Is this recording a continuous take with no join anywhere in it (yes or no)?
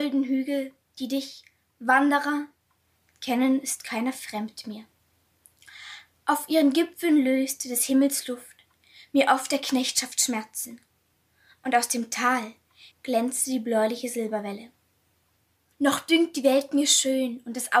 no